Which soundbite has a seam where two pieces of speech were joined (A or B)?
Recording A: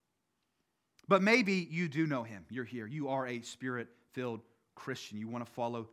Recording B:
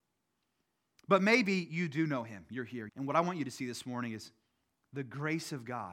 B